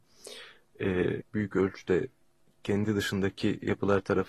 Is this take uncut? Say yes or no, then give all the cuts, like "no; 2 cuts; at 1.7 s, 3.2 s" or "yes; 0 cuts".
no; 1 cut; at 1.2 s